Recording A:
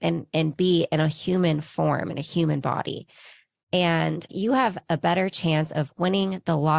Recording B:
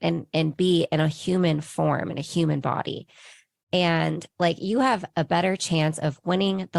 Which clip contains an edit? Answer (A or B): A